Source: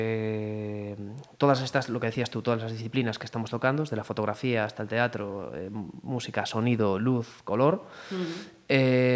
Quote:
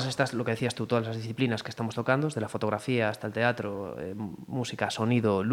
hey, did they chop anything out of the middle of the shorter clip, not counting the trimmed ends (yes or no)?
no